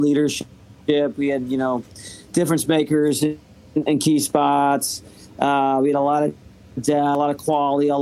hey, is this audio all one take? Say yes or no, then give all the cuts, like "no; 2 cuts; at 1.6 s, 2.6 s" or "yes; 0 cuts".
yes; 0 cuts